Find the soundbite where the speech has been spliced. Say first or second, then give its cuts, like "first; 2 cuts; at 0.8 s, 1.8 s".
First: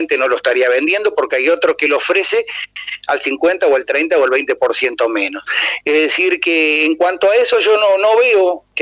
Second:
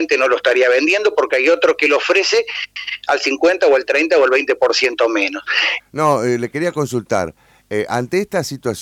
second; 1 cut; at 5.8 s